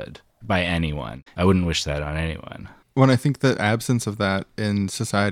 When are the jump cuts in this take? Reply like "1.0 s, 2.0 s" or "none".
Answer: 1.3 s

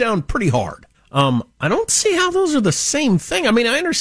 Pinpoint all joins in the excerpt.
0.9 s

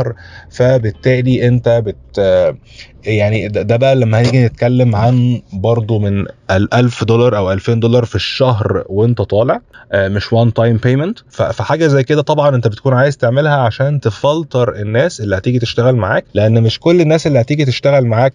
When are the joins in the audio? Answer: 16.3 s

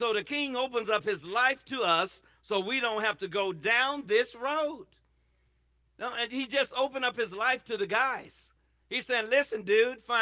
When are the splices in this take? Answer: none

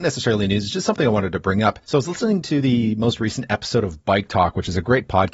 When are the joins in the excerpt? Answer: 1.8 s

